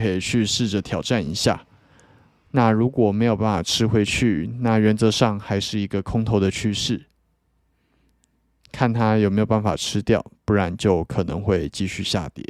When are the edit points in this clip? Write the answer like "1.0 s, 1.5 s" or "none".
none